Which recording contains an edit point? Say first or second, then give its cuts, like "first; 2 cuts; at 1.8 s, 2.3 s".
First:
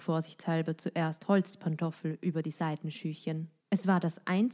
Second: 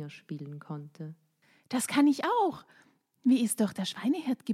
first; 1 cut; at 3.6 s